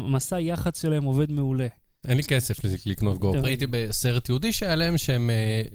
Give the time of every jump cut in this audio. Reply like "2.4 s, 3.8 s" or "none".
2.0 s, 3.4 s

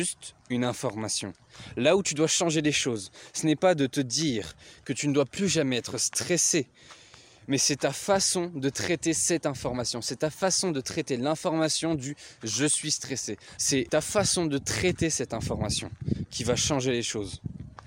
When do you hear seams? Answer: 13.6 s

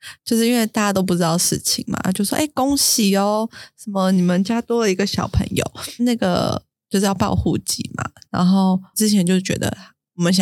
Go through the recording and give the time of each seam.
6.0 s, 8.9 s

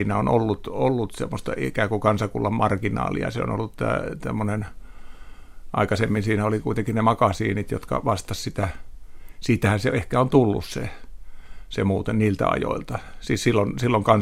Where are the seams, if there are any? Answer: none

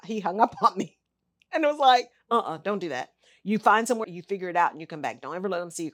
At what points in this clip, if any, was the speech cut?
4.0 s

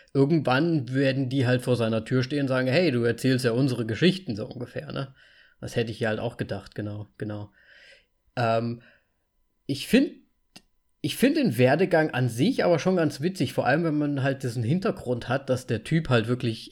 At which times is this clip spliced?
none

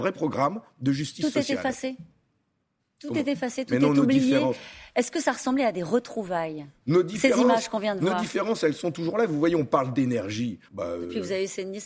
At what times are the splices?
10.7 s

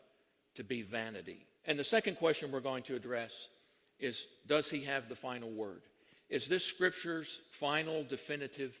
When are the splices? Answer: 1.6 s

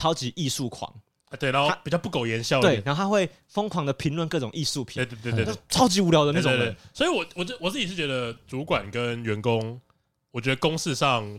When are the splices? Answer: none

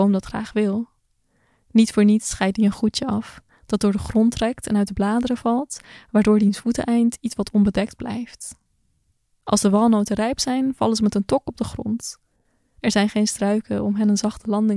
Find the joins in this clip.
none

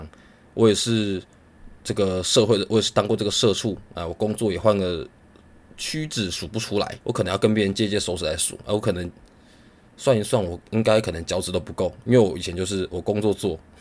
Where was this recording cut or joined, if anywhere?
7.0 s

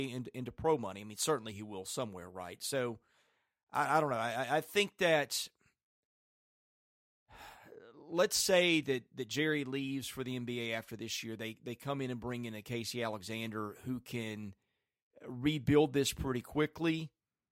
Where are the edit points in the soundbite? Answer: none

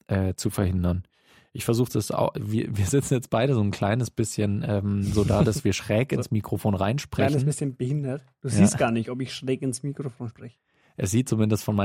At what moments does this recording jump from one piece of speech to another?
none

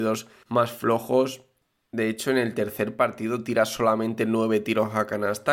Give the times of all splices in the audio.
none

